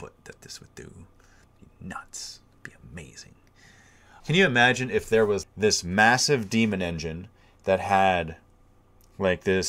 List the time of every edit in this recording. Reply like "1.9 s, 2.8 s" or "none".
4.2 s, 5.4 s

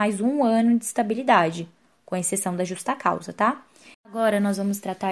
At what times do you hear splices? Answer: 3.9 s

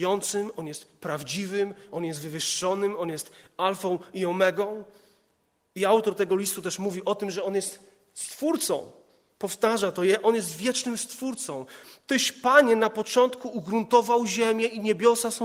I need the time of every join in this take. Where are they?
none

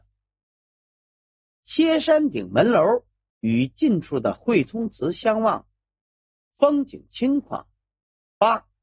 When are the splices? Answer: 3.3 s

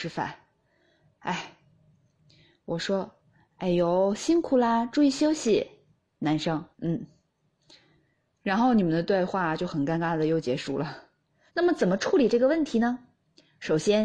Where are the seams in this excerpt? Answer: 6.7 s, 11.5 s

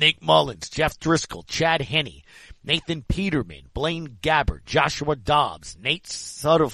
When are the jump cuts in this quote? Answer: none

